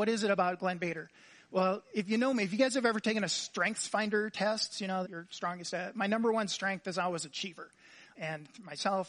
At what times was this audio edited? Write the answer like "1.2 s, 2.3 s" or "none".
5.0 s, 8.1 s